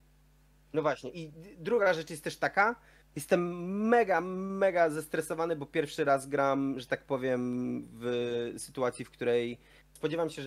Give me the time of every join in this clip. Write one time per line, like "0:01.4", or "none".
none